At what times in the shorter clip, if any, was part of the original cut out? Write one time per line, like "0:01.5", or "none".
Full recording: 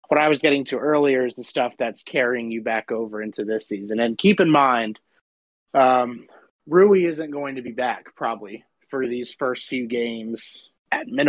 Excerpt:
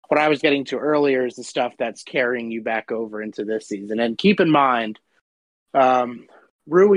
none